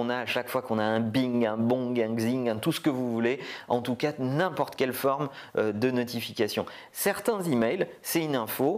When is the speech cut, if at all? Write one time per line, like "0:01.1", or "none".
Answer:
0:06.9